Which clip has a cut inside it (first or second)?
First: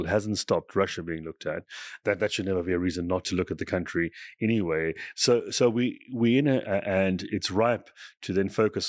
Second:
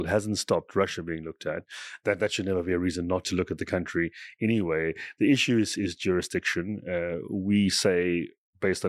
first